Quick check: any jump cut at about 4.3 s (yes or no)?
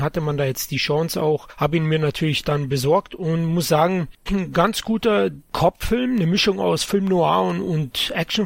yes